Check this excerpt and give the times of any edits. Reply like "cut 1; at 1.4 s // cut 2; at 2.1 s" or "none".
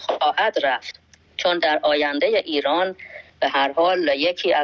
cut 1; at 3.3 s